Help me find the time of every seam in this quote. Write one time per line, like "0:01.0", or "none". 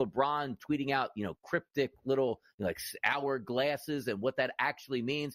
none

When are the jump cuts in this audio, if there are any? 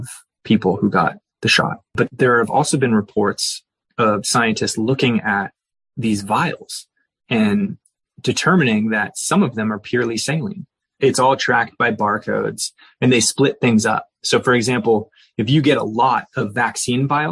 0:11.0

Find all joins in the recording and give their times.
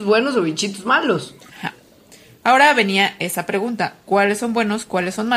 0:01.5

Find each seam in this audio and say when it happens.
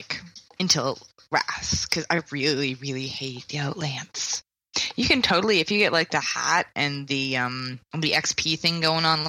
none

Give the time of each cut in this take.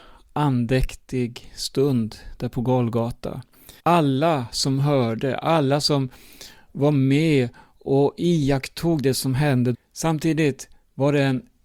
0:03.8
0:09.7

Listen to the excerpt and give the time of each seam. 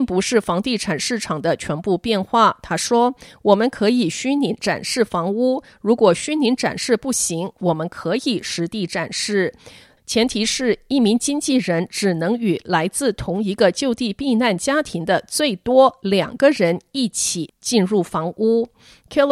none

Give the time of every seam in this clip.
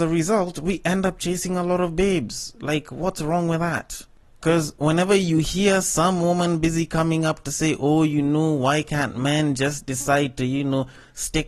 none

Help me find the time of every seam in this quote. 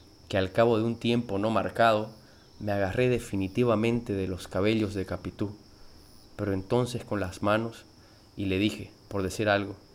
0:09.0

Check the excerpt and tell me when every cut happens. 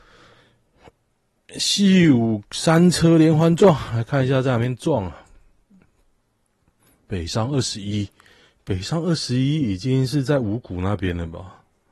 none

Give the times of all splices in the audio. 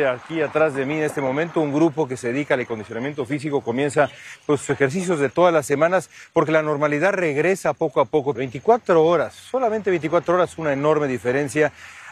0:08.4

